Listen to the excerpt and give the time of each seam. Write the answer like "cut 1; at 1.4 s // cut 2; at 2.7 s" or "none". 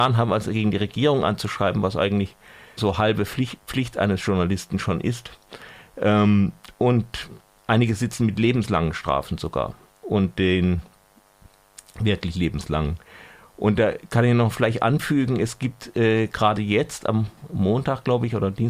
cut 1; at 2.8 s